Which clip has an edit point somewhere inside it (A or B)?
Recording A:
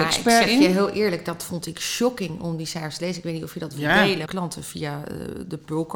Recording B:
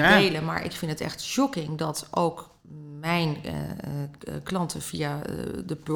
A